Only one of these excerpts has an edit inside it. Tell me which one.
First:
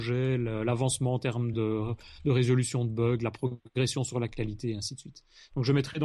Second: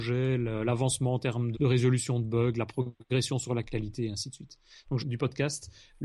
second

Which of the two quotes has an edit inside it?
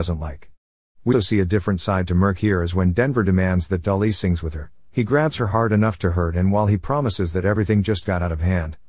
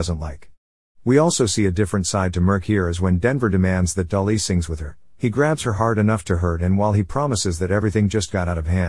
first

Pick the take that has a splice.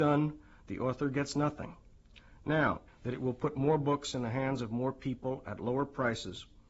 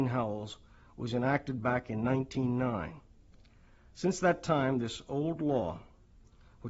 first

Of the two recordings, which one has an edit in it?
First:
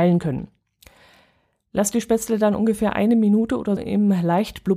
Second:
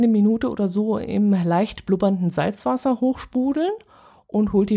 first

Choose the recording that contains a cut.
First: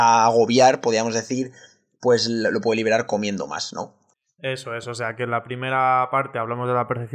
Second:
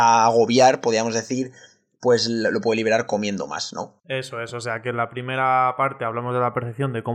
second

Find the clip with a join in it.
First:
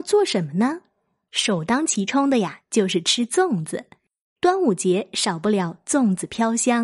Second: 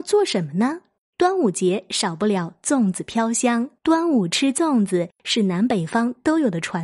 second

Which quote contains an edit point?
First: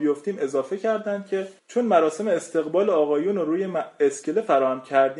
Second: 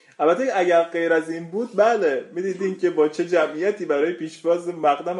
first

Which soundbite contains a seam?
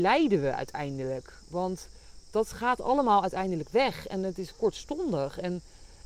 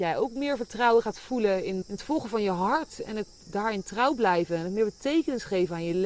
second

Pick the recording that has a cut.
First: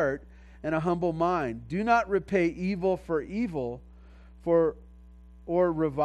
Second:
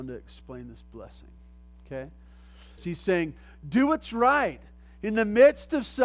second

